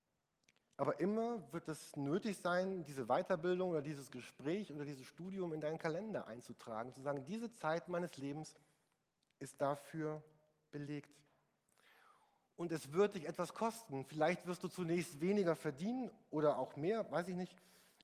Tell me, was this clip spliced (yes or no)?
no